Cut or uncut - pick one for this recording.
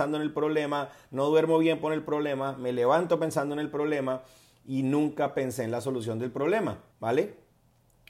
cut